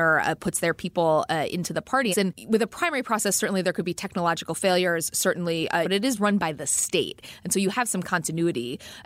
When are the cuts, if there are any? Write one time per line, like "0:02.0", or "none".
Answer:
0:02.1
0:05.8

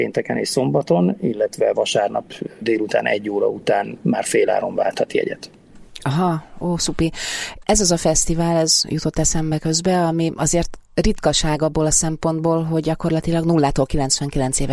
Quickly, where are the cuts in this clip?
none

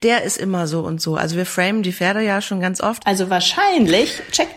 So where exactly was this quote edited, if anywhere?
0:03.0

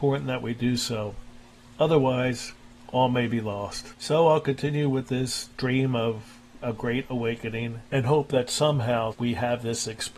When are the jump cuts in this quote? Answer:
0:09.1

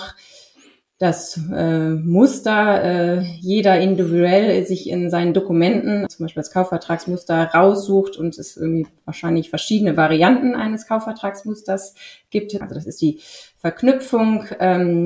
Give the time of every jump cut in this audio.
0:06.1
0:12.6

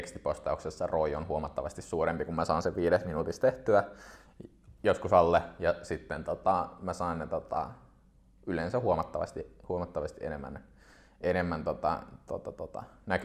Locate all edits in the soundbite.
none

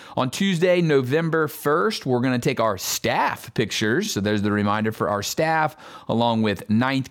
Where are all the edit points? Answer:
none

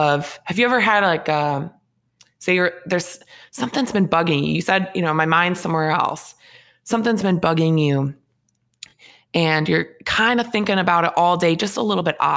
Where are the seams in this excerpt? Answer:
none

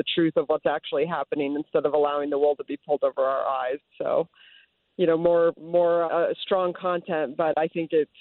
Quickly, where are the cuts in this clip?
0:03.8
0:06.1

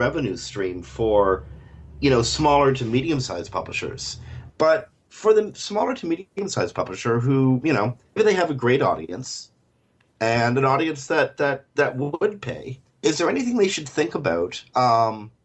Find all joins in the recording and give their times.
0:04.5
0:08.2
0:12.9

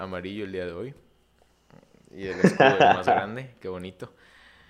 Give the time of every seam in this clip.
none

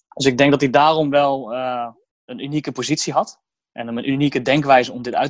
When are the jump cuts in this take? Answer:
none

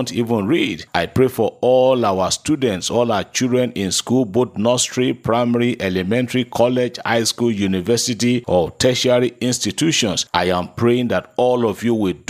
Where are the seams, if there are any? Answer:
0:00.9

